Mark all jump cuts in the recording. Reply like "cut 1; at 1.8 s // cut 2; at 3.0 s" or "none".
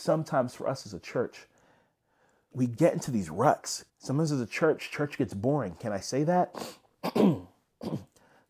cut 1; at 2.5 s // cut 2; at 3.9 s